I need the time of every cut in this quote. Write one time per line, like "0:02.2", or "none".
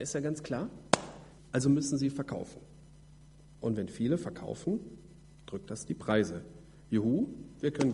0:01.4